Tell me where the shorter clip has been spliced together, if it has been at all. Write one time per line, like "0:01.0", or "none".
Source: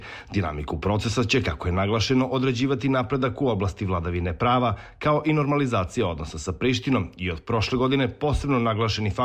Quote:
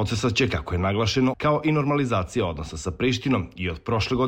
0:01.3